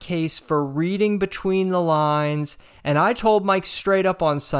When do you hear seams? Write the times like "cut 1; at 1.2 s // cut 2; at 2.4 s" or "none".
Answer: cut 1; at 3.2 s